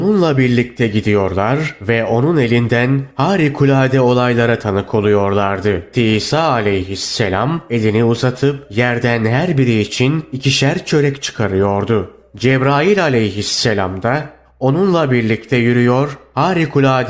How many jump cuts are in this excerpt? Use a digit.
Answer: 1